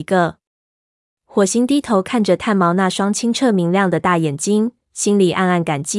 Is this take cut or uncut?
uncut